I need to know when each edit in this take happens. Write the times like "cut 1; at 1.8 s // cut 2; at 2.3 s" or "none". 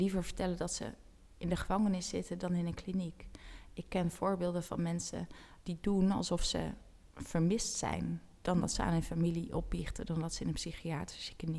cut 1; at 5.6 s

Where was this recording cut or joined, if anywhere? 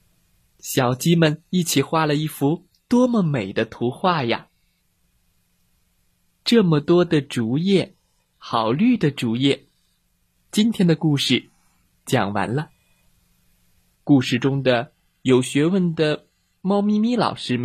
cut 1; at 8.3 s // cut 2; at 10.4 s // cut 3; at 13.9 s

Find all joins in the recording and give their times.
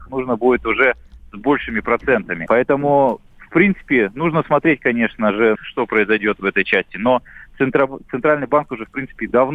cut 1; at 2.5 s // cut 2; at 5.6 s

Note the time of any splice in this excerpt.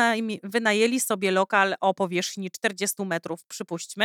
none

